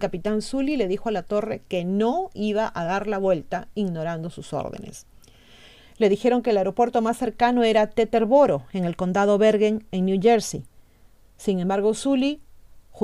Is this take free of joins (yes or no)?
yes